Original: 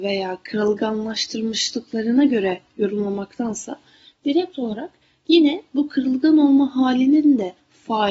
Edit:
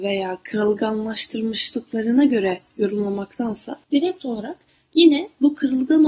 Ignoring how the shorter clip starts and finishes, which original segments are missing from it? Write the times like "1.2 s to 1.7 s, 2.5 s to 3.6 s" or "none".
3.8 s to 4.2 s